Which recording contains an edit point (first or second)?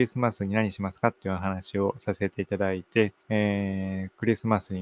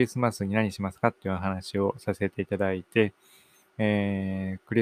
first